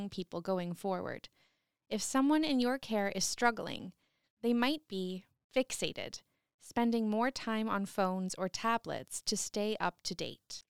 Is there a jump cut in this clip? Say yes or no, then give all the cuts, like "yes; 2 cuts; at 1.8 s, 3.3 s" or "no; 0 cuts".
no; 0 cuts